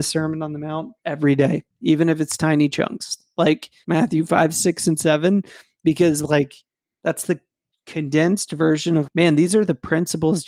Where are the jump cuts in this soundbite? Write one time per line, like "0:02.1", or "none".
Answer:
0:03.8
0:09.1